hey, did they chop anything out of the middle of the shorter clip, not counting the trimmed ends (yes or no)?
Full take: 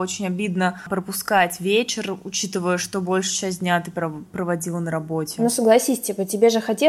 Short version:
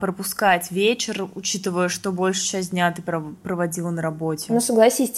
no